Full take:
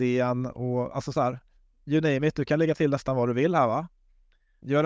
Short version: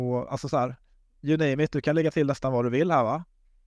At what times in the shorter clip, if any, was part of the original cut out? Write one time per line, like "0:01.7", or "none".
none